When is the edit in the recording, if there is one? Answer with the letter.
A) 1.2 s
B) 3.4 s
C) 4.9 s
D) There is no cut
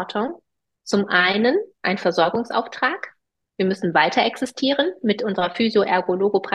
D